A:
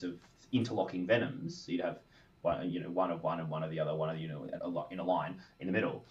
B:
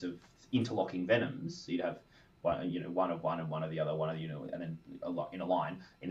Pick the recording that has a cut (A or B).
A